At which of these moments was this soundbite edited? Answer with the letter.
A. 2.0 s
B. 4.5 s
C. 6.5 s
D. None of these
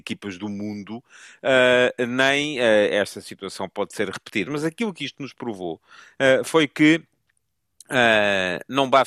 B